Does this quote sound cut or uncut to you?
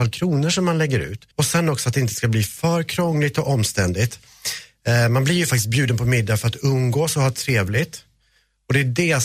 cut